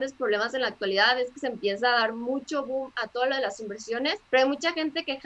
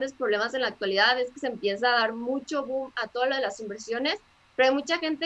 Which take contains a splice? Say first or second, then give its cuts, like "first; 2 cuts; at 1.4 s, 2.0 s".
first; 1 cut; at 4.2 s